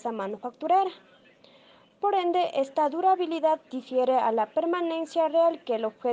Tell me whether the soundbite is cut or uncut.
uncut